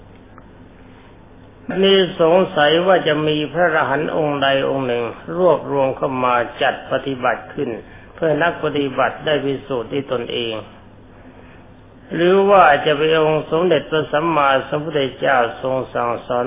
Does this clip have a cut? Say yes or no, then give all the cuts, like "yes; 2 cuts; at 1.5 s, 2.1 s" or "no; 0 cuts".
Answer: yes; 1 cut; at 1.7 s